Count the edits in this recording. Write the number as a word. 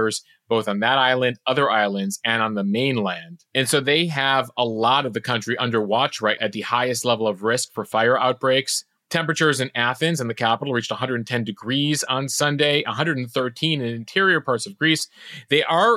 one